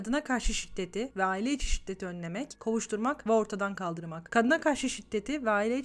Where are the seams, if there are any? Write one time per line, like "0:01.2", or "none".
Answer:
0:04.3